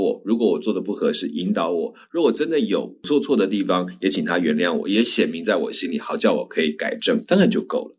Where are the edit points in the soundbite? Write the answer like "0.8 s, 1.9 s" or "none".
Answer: none